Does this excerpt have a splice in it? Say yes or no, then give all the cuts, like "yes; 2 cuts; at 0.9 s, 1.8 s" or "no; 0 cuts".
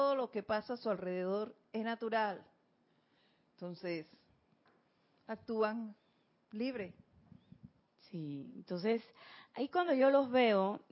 no; 0 cuts